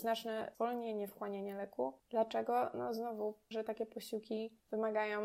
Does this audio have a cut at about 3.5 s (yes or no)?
yes